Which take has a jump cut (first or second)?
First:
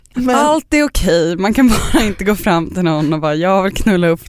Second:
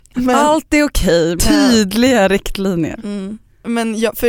second